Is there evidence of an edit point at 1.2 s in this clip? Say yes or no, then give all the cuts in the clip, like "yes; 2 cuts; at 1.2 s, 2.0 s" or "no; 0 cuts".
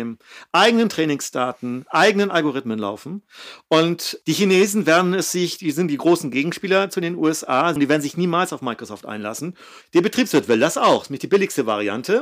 no; 3 cuts; at 4.2 s, 7.8 s, 9.8 s